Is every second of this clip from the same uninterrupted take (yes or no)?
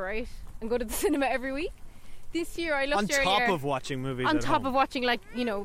yes